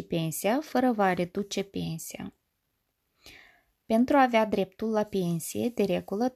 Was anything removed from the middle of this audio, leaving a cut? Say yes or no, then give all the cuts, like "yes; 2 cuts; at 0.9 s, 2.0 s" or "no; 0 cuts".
no; 0 cuts